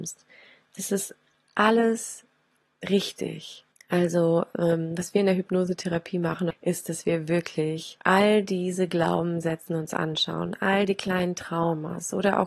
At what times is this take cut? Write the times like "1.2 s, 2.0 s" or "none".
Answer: 3.7 s, 6.5 s, 8.0 s

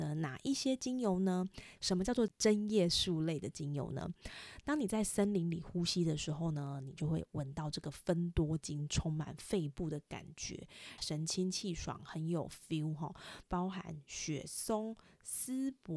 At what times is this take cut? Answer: 1.8 s, 11.0 s, 13.4 s

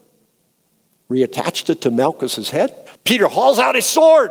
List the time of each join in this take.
2.9 s

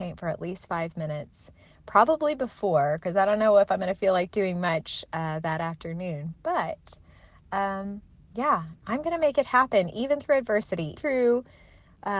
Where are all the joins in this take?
11.0 s

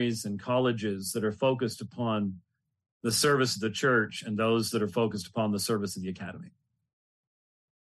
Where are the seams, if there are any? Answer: none

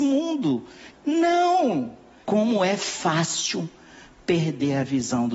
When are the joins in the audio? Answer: 0.9 s, 2.2 s

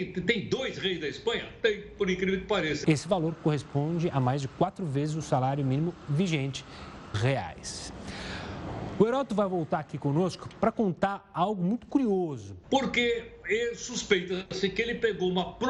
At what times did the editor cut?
2.8 s, 7.1 s, 12.6 s

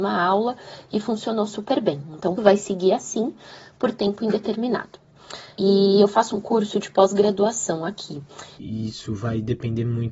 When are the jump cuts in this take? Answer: 2.4 s, 5.5 s, 8.6 s

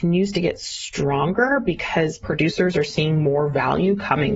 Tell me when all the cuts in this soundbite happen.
none

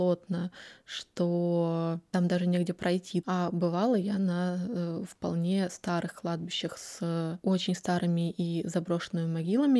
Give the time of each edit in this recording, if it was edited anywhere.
3.2 s

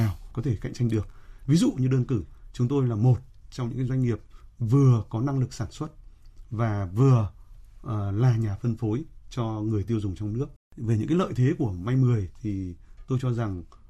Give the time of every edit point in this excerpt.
10.6 s

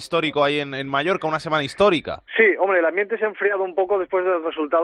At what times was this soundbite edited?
2.3 s

